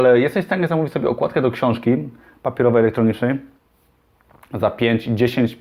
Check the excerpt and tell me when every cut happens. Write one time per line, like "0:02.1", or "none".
none